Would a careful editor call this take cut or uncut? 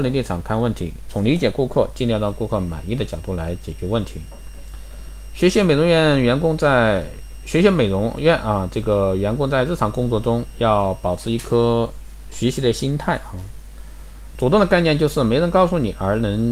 cut